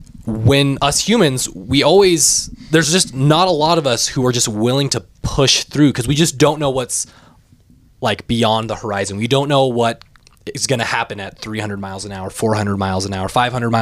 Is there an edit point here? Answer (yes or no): no